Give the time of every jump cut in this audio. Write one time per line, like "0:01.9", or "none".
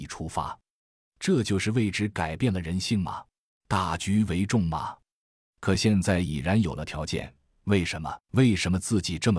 0:03.6